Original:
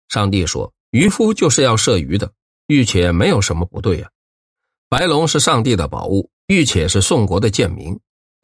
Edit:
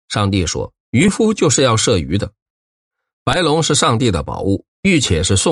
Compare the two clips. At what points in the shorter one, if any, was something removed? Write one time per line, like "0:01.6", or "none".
0:02.5